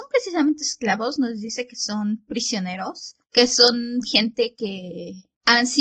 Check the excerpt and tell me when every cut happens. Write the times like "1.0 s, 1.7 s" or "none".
none